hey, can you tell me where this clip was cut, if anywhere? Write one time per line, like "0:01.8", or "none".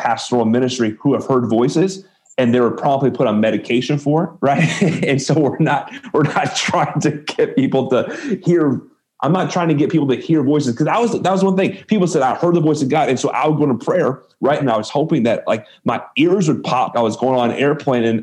0:14.6
0:16.9